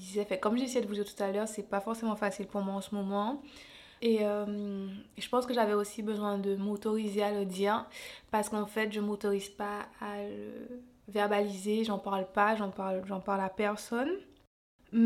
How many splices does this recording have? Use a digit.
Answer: 1